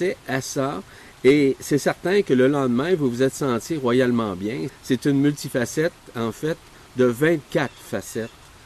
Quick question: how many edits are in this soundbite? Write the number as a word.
one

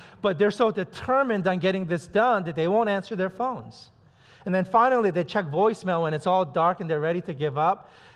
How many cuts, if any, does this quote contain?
zero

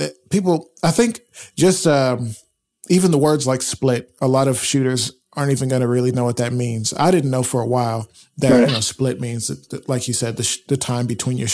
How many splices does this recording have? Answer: zero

